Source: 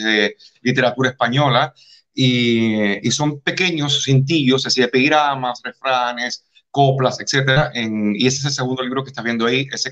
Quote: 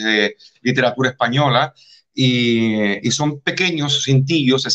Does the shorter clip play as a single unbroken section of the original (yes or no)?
yes